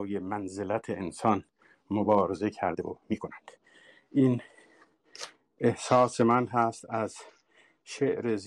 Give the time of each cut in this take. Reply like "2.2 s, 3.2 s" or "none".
none

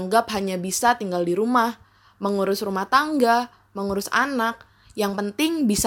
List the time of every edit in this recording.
none

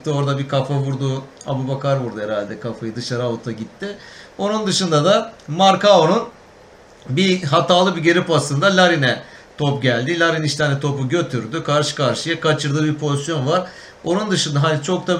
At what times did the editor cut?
none

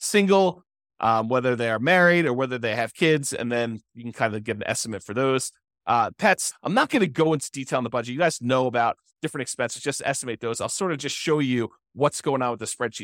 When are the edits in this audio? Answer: 6.5 s

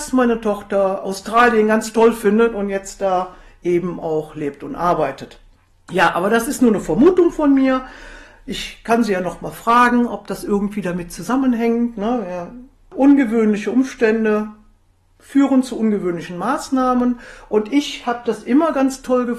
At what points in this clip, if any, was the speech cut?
none

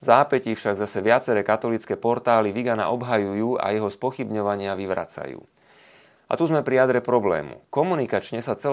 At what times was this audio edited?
none

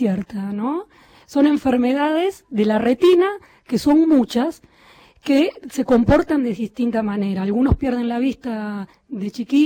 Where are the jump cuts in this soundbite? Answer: 1.2 s

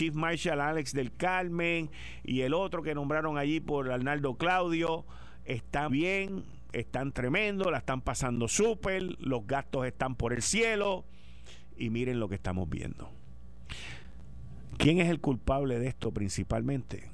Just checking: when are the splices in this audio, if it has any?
5.9 s

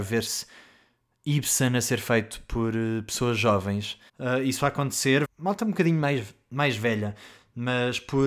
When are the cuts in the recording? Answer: 4.1 s, 5.2 s

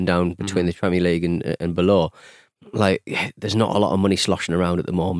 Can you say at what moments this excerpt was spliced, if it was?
none

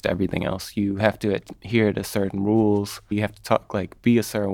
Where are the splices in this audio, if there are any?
3.1 s

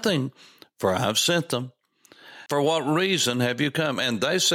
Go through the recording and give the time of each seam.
2.5 s

